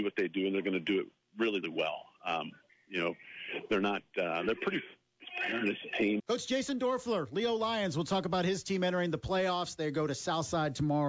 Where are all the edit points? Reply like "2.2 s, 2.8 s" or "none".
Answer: 1.6 s, 6.2 s